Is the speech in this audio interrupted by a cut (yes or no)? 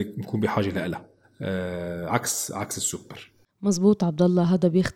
no